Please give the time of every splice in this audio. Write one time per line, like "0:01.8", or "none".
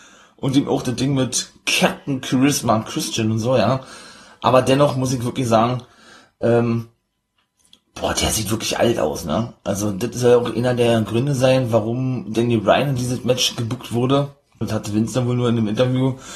0:14.6